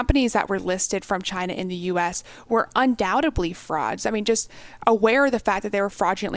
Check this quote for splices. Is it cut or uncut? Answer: uncut